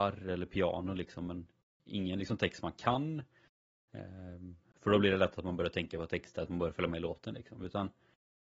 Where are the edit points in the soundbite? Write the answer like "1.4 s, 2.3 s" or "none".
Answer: none